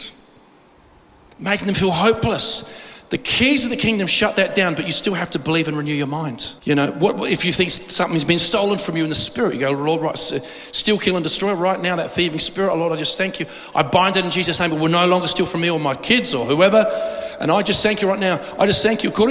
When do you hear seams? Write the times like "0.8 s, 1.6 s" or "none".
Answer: 6.6 s